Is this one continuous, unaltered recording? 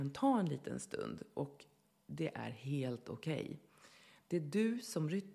yes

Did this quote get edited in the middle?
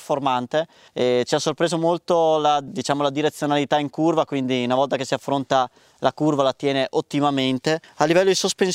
no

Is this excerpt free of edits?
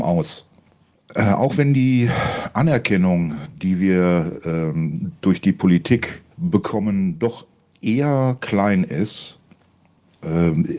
no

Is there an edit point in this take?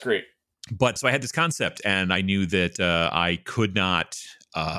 yes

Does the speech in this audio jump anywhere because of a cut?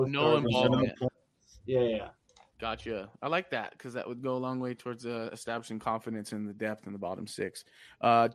no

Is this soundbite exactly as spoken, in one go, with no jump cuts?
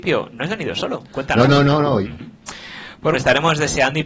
no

